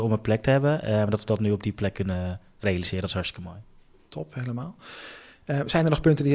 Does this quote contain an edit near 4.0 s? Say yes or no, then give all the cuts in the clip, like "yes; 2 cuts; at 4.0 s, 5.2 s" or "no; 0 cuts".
no; 0 cuts